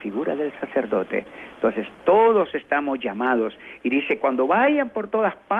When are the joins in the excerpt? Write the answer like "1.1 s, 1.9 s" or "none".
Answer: none

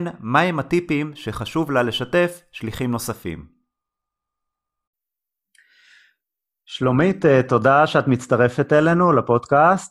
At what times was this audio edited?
none

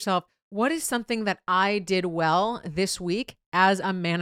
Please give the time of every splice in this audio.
none

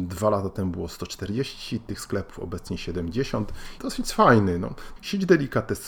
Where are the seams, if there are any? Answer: 3.8 s, 5.0 s

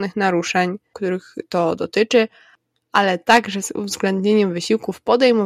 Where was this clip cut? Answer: 0.9 s

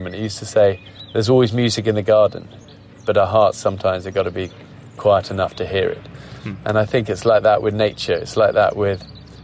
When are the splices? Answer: none

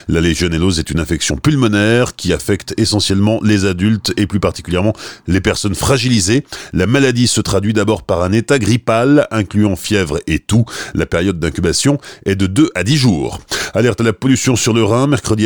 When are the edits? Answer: none

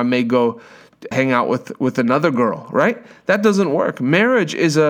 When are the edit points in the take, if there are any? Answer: 1.1 s

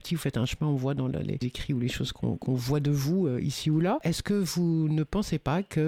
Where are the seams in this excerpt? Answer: none

